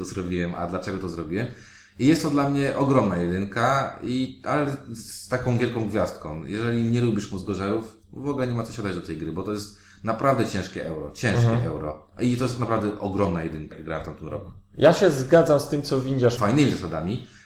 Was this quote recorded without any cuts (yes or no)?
no